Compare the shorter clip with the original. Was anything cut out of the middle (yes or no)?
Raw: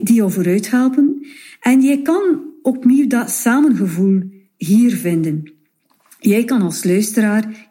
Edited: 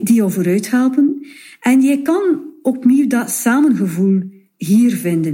no